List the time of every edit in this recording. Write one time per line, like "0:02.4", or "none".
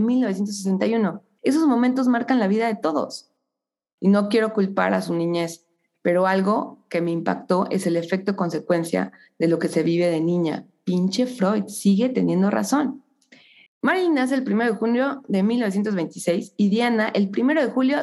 0:01.4
0:04.0
0:13.7